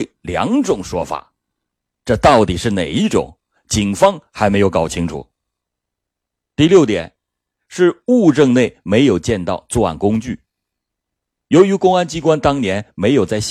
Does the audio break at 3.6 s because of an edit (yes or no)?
no